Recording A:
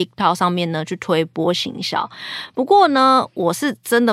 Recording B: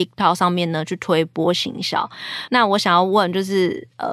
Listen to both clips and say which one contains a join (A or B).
B